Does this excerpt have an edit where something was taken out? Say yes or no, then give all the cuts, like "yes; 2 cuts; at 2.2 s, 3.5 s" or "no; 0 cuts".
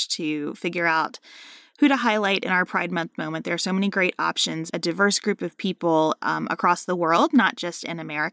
yes; 1 cut; at 4.7 s